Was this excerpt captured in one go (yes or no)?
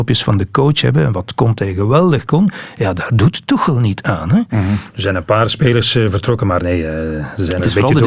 no